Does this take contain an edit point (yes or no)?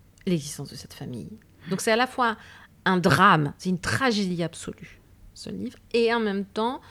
no